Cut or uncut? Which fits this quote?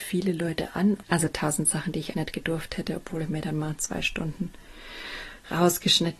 cut